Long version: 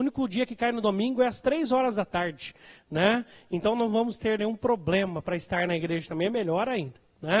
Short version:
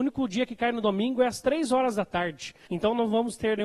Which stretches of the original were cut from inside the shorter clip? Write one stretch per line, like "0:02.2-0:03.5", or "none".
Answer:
0:02.7-0:03.5